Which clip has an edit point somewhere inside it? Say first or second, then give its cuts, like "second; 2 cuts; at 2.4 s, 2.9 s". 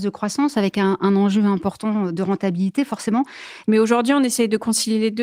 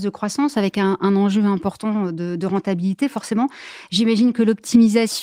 first; 2 cuts; at 2.1 s, 3.6 s